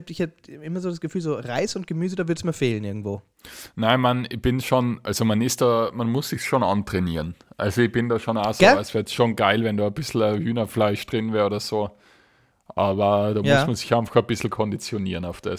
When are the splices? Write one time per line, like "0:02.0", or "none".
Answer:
none